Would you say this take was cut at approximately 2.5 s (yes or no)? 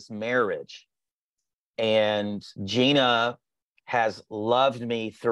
yes